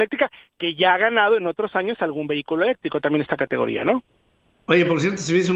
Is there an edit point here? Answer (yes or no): no